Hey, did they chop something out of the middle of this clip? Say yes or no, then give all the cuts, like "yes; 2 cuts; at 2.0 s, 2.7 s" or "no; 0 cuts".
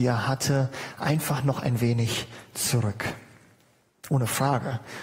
no; 0 cuts